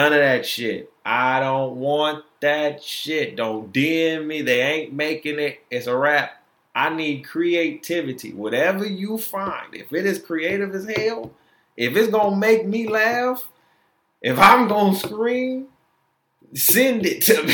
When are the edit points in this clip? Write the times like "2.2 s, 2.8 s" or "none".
none